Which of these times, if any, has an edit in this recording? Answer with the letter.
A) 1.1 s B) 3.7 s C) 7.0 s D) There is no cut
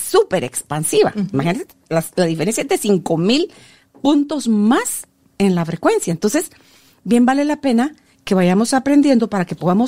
D